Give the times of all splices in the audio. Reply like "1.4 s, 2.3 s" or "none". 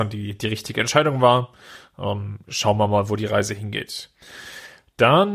none